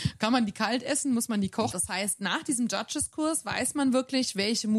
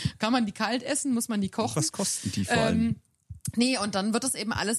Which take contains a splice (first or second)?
first